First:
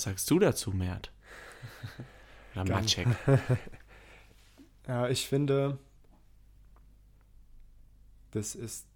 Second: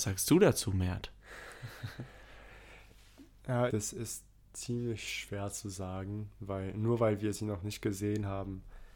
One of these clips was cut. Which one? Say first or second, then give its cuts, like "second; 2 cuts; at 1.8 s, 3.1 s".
second; 2 cuts; at 2.5 s, 3.7 s